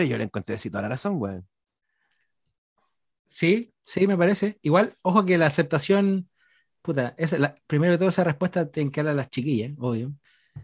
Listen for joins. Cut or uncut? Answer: uncut